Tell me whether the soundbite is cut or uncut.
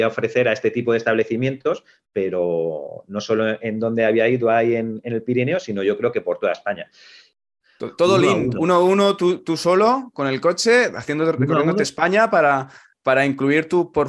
uncut